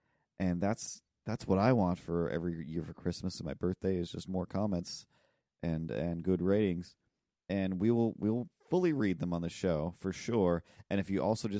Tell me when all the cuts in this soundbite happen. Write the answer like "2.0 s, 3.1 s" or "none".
none